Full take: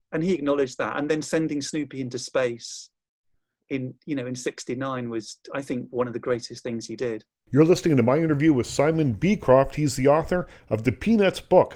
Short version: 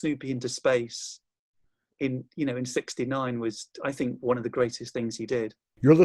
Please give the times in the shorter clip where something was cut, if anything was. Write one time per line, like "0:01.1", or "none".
none